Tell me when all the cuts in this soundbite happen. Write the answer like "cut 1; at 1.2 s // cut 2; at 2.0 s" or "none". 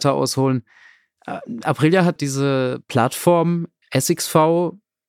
cut 1; at 2.2 s